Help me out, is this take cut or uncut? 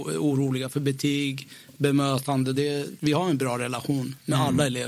cut